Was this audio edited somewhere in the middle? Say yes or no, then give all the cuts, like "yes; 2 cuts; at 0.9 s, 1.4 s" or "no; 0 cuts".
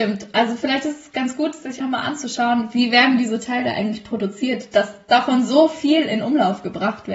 yes; 1 cut; at 1.8 s